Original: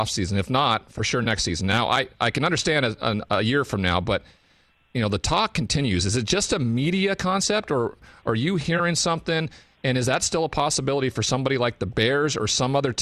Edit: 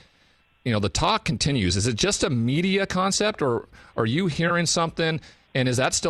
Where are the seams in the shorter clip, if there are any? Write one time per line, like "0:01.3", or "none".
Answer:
none